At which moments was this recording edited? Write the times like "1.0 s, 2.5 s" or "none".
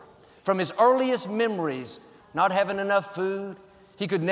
2.2 s